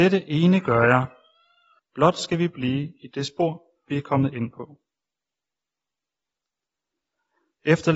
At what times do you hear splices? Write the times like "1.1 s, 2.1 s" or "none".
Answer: 1.8 s